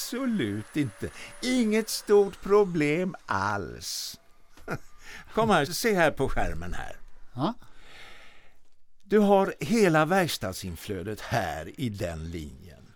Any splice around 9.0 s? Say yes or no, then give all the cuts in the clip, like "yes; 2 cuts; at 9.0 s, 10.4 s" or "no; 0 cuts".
no; 1 cut; at 5.7 s